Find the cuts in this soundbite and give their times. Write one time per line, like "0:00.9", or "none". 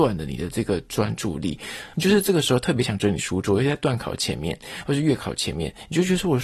0:01.9

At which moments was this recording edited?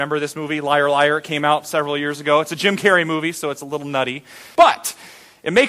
0:04.6

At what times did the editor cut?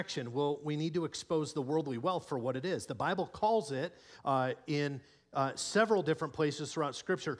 none

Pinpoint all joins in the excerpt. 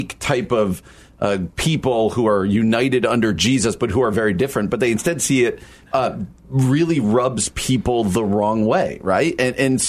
0:05.8

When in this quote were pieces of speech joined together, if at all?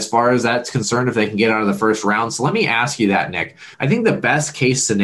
0:03.7

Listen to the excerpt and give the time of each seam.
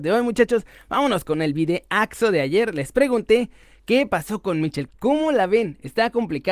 0:03.8
0:04.9

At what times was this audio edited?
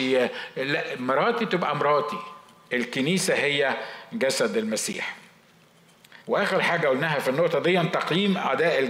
0:06.2

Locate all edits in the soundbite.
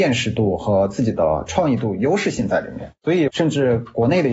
0:03.3

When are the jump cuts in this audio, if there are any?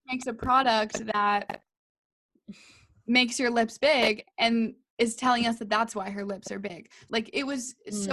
0:07.1

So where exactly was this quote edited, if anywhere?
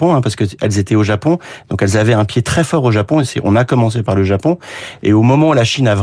none

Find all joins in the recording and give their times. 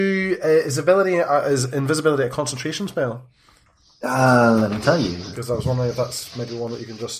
none

